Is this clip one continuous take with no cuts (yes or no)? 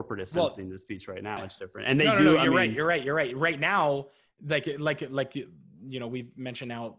no